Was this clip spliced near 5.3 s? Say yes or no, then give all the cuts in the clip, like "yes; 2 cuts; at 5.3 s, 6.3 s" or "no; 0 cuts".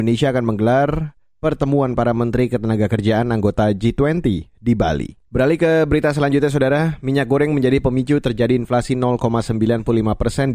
yes; 1 cut; at 5.3 s